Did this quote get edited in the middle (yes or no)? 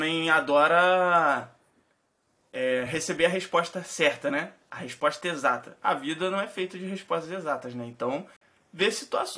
no